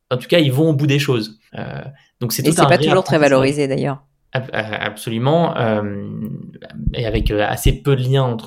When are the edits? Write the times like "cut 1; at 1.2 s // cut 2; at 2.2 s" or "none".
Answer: cut 1; at 1.5 s // cut 2; at 4.3 s